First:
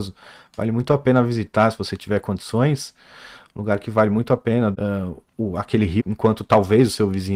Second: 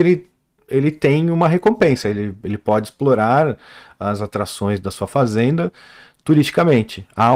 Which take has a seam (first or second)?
first